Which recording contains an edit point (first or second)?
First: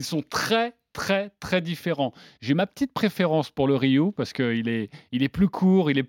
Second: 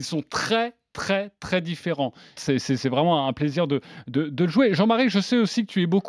second